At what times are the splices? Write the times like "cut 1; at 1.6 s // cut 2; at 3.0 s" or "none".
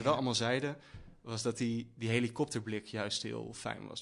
none